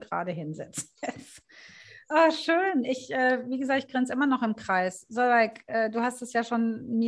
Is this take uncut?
yes; 0 cuts

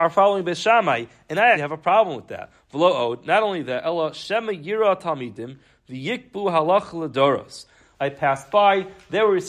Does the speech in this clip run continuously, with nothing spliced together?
no; 2 cuts; at 1.5 s, 7.9 s

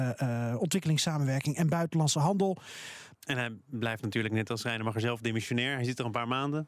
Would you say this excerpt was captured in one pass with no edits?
no; 1 cut; at 3.1 s

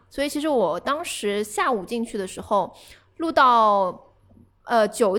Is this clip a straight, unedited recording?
yes; 0 cuts

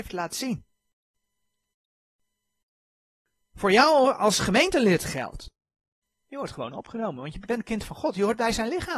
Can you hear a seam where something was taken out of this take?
yes; 1 cut; at 6.1 s

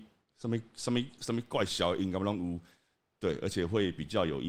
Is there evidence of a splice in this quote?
yes; 1 cut; at 3.1 s

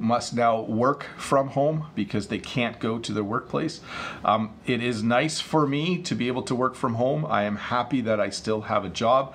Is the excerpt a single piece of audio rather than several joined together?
yes; 0 cuts

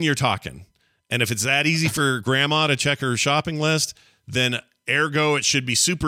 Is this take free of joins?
yes; 0 cuts

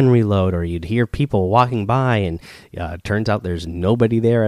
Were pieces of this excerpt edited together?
no; 0 cuts

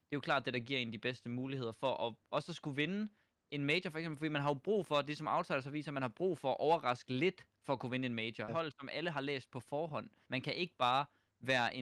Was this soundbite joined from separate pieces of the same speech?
yes; 2 cuts; at 8.5 s, 10.3 s

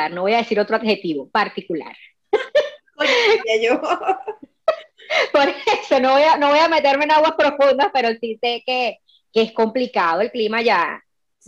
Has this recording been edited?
yes; 1 cut; at 3.4 s

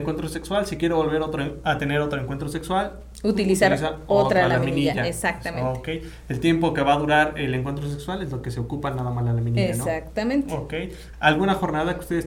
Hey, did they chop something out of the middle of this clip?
yes; 1 cut; at 11.1 s

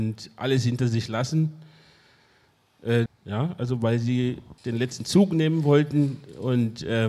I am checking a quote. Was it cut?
yes; 2 cuts; at 3.1 s, 4.6 s

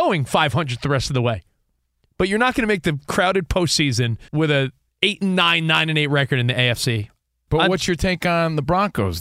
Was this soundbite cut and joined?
yes; 2 cuts; at 4.3 s, 7.5 s

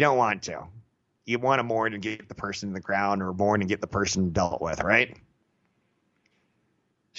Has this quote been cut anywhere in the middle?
no; 0 cuts

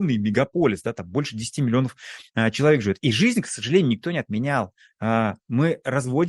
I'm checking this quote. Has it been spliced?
no; 0 cuts

